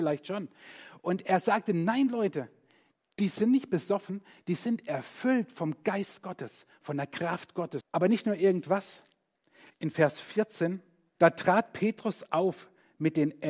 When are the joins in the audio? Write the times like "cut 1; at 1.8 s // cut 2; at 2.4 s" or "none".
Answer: cut 1; at 7.8 s // cut 2; at 9.7 s // cut 3; at 11.2 s